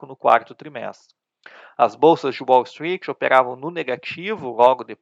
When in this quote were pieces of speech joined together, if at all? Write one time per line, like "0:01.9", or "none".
none